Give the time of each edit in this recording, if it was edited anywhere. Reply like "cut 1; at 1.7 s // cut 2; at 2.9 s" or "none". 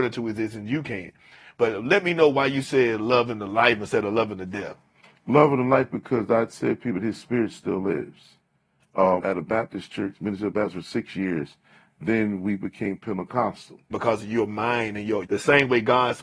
cut 1; at 9.2 s // cut 2; at 13.9 s // cut 3; at 15.3 s